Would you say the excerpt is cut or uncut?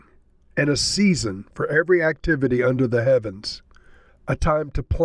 cut